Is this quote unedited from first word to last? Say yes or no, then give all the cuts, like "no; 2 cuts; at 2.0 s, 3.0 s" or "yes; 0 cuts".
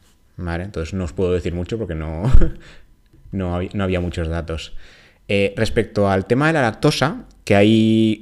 yes; 0 cuts